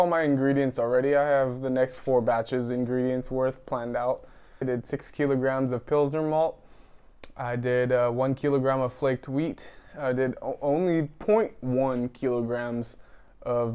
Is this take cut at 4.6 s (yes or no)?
yes